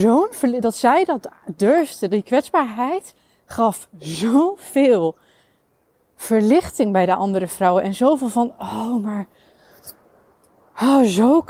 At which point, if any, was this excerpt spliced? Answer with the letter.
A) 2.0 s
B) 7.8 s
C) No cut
C